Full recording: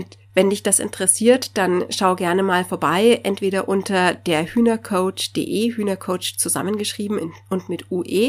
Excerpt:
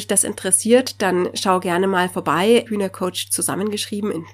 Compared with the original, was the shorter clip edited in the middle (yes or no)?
yes